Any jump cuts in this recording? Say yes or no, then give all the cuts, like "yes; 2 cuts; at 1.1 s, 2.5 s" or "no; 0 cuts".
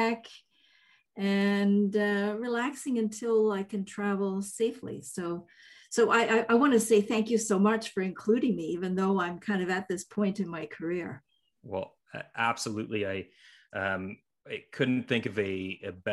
no; 0 cuts